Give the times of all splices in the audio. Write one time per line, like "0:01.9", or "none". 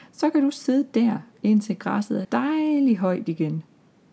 0:02.2